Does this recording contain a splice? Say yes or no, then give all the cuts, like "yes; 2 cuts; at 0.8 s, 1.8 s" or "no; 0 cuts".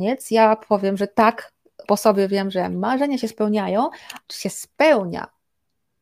yes; 2 cuts; at 1.8 s, 4.2 s